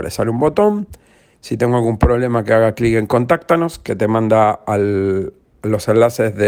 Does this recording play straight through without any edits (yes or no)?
yes